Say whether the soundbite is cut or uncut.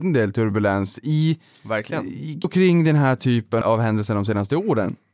cut